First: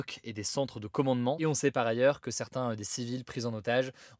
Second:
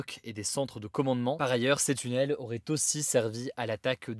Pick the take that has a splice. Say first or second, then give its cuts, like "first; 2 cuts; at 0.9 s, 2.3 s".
first; 1 cut; at 1.4 s